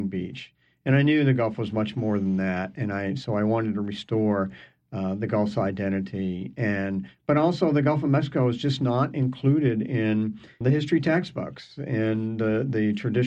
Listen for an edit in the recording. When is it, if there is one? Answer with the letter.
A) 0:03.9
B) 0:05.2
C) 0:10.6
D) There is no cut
C